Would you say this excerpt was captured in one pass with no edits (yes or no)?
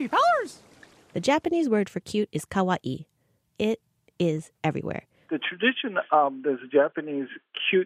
no